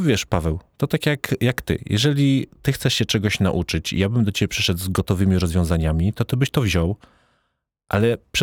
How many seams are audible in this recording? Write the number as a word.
zero